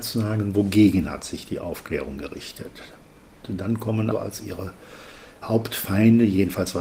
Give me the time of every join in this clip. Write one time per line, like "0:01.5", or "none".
0:04.1